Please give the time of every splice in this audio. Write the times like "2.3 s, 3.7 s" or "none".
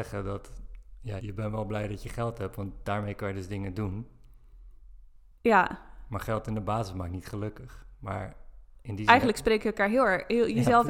1.2 s